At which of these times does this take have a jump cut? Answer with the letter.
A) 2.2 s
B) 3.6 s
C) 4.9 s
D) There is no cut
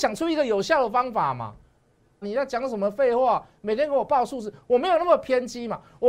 A